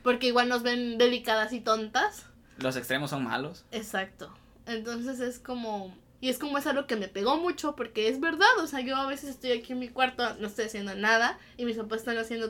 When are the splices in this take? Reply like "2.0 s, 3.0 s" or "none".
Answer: 6.2 s